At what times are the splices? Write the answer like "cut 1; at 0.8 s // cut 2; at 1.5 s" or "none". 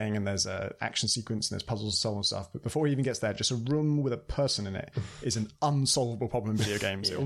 none